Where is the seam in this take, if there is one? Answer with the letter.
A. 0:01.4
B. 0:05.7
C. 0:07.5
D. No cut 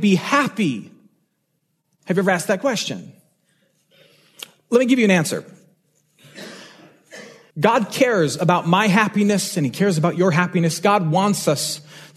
C